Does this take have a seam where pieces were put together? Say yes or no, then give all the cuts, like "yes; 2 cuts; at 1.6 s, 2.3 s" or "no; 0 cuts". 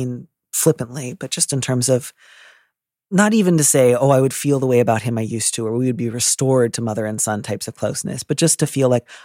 no; 0 cuts